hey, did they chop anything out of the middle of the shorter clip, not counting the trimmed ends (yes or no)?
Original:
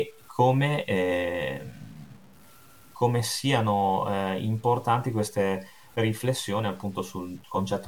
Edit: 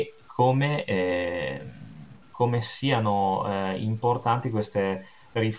yes